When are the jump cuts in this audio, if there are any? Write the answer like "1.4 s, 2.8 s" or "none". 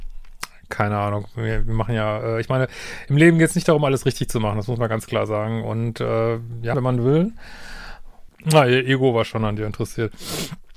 6.7 s, 8.3 s